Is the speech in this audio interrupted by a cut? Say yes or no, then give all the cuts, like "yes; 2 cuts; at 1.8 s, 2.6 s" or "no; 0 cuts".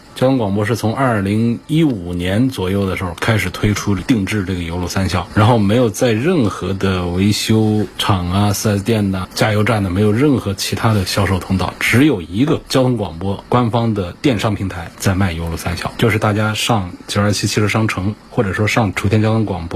no; 0 cuts